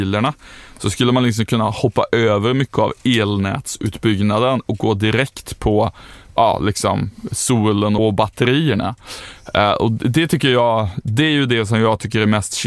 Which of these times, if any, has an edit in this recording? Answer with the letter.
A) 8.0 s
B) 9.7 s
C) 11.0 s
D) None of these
A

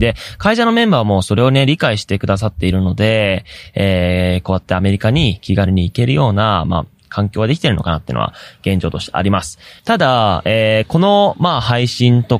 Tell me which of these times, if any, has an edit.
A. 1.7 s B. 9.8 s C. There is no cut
B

